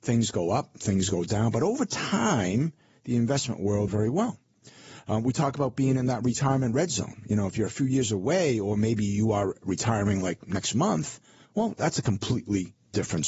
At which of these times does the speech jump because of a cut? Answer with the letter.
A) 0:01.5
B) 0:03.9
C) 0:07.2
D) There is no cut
B